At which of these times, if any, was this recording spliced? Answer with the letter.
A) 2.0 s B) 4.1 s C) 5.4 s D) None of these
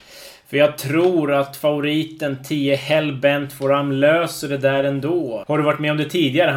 C